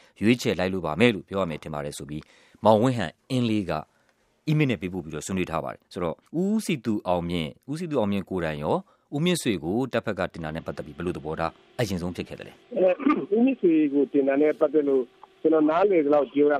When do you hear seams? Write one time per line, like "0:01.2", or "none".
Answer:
0:06.3
0:12.6